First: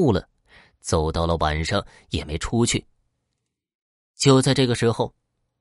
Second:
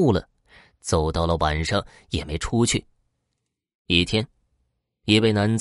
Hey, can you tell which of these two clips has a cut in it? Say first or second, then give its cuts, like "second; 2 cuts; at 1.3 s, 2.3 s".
second; 1 cut; at 3.8 s